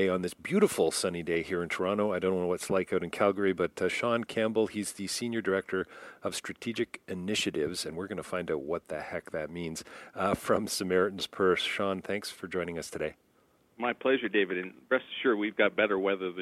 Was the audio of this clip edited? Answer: no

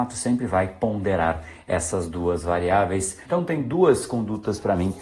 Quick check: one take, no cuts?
no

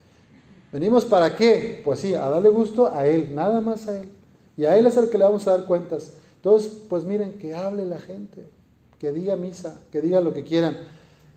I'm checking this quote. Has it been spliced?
no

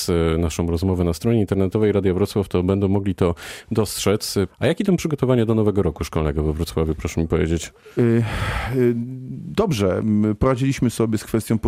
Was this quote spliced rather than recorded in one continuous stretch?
yes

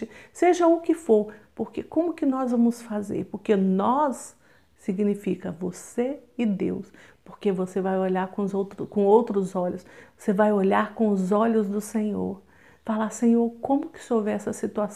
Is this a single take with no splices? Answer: no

